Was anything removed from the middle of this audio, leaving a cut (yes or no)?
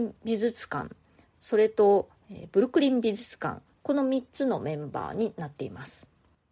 no